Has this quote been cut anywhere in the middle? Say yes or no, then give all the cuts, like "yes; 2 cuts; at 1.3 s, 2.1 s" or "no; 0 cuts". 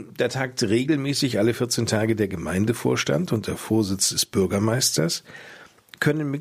no; 0 cuts